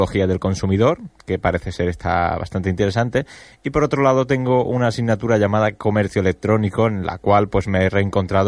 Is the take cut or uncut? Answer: uncut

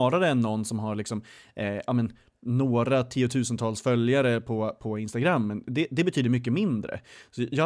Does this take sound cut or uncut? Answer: uncut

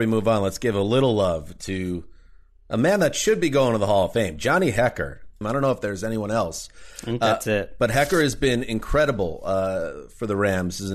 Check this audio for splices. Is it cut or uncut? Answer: cut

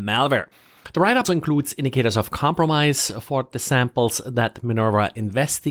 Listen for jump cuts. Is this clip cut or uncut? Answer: cut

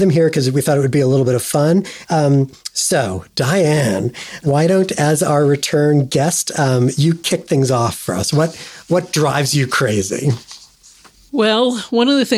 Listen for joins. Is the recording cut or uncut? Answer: cut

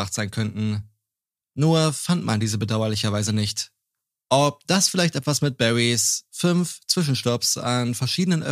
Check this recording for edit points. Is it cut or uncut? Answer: uncut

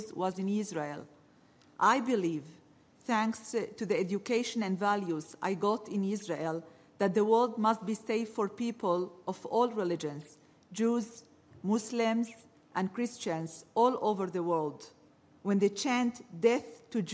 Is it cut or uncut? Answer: uncut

